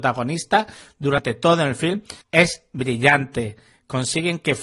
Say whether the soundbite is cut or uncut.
cut